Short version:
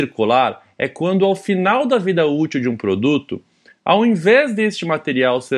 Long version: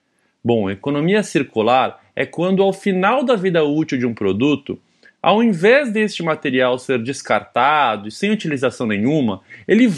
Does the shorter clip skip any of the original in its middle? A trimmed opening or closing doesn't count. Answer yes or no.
no